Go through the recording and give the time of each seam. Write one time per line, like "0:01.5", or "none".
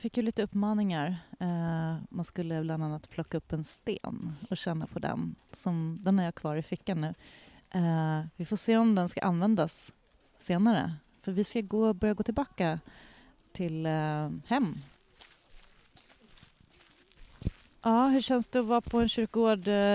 none